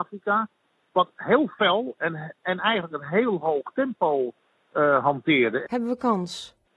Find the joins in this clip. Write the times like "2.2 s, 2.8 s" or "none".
5.6 s